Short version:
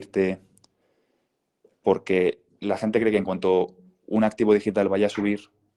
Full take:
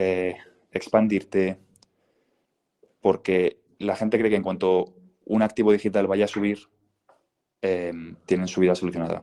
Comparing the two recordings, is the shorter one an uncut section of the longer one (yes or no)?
yes